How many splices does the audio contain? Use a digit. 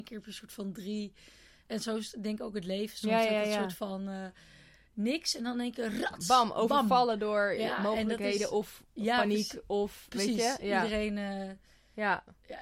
0